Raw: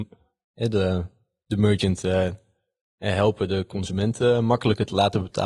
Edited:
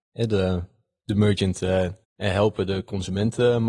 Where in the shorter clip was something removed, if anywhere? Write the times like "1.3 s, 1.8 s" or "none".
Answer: 2.0 s